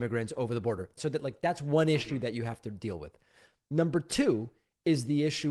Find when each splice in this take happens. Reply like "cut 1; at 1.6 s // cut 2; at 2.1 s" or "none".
cut 1; at 1.0 s